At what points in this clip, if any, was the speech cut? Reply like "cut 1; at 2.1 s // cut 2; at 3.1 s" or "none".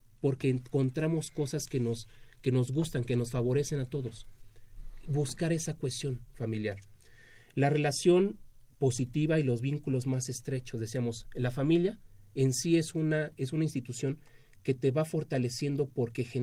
none